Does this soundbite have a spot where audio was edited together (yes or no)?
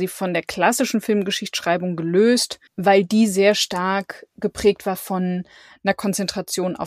yes